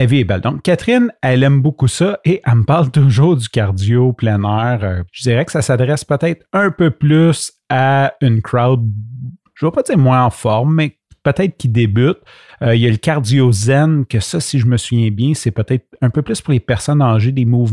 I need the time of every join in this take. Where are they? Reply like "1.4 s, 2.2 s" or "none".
5.1 s